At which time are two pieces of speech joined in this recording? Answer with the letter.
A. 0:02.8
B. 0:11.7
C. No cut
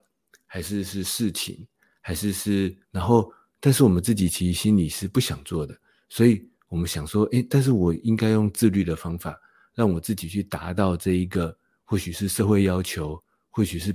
A